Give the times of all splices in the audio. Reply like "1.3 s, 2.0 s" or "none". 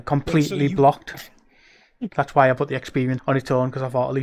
2.1 s, 3.2 s